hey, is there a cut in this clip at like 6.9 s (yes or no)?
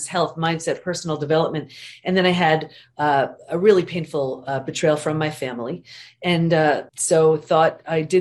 yes